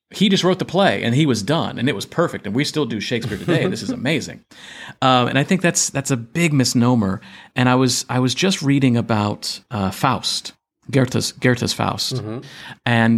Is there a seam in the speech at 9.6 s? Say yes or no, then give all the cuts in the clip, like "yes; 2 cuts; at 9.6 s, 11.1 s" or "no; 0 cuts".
no; 0 cuts